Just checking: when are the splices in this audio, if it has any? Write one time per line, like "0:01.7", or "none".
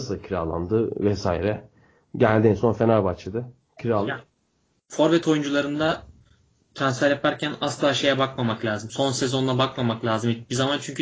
0:08.9